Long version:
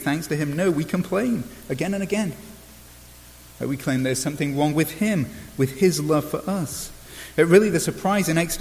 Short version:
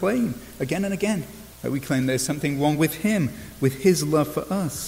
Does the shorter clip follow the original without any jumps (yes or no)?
no